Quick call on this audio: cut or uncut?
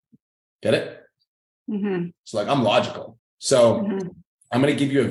cut